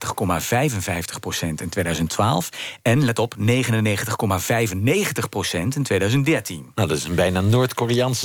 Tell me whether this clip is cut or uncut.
uncut